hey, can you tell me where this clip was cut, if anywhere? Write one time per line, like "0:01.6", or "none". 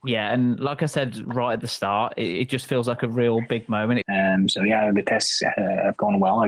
0:04.0